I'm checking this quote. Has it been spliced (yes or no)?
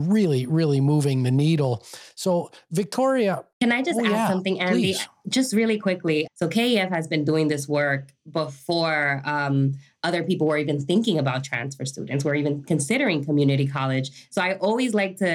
yes